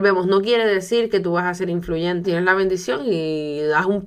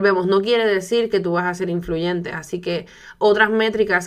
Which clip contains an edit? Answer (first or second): first